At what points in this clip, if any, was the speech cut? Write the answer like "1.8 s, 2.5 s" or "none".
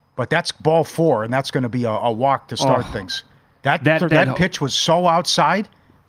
none